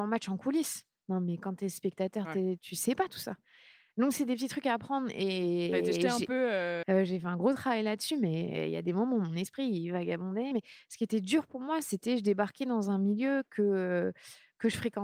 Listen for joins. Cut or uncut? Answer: cut